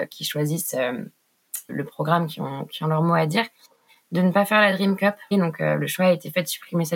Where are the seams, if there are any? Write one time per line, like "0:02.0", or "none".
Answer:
0:01.7
0:05.3

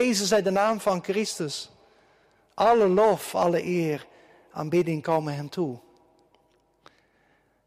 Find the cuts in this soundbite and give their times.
none

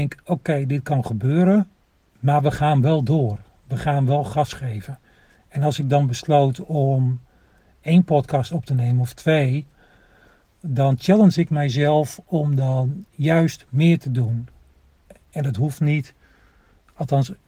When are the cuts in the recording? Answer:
none

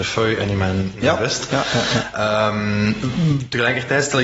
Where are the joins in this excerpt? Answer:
none

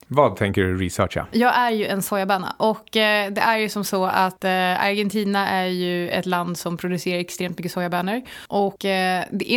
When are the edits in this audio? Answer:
none

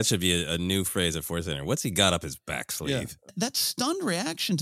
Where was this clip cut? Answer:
0:03.3

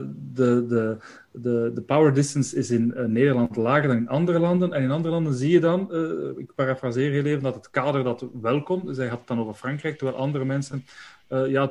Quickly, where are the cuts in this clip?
none

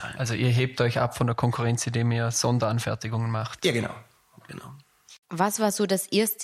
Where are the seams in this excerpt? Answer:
0:05.2

